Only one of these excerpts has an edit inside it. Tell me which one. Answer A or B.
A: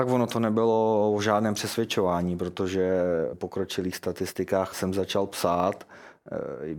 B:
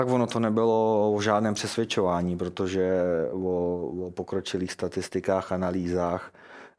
A